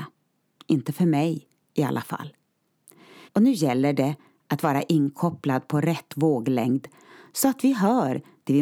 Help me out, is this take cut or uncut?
cut